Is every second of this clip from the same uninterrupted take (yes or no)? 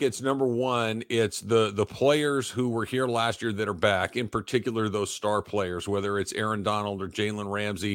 yes